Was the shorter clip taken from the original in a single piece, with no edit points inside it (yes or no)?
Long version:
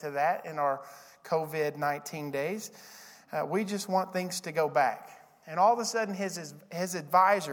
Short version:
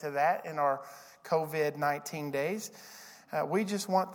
yes